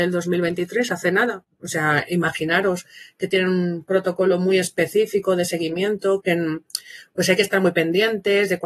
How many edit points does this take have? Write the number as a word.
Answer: two